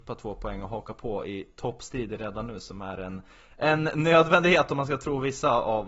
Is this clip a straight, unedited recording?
yes; 0 cuts

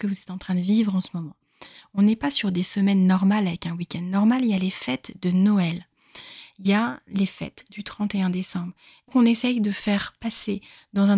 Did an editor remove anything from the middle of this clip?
yes; 1 cut; at 9.1 s

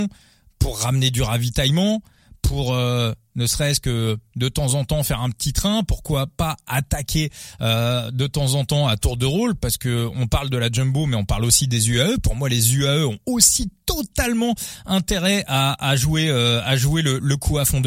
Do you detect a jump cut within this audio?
no; 0 cuts

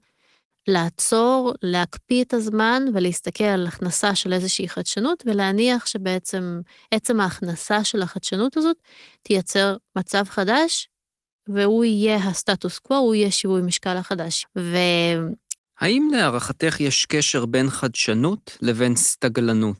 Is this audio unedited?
no; 2 cuts; at 14.4 s, 15.6 s

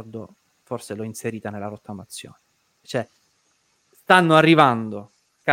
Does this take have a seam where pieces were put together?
yes; 1 cut; at 2.8 s

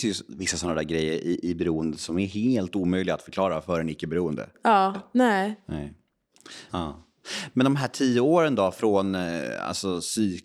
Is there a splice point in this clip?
yes; 2 cuts; at 4.9 s, 6.7 s

